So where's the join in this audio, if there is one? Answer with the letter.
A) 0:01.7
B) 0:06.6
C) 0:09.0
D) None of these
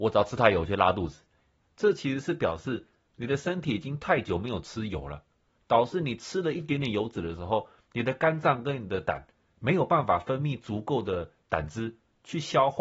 D